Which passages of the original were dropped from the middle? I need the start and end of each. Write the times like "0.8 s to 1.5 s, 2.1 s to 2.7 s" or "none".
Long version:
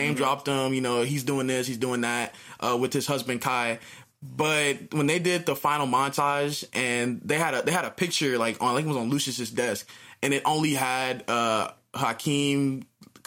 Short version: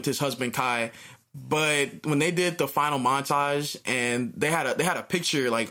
none